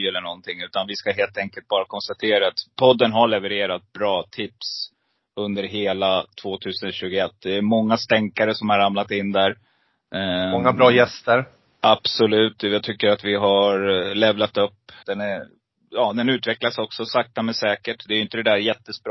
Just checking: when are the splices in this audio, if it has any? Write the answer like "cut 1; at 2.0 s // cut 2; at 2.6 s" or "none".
cut 1; at 15.0 s